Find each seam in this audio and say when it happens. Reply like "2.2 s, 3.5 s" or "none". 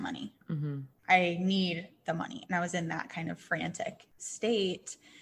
none

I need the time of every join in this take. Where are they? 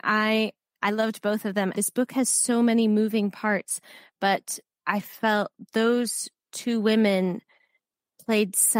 1.7 s

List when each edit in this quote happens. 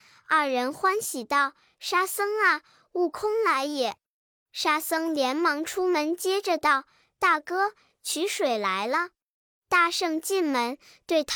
none

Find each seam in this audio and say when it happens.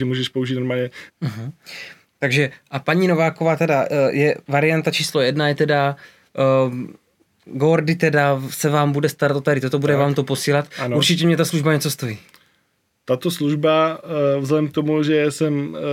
1.1 s

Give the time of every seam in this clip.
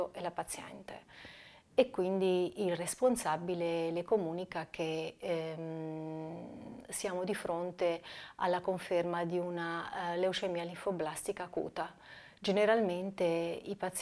none

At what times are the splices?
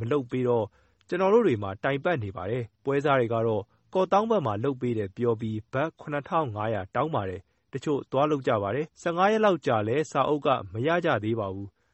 2.7 s, 8.9 s

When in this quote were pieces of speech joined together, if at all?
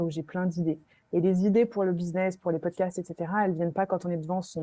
none

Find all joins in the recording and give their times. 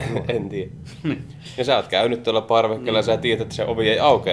none

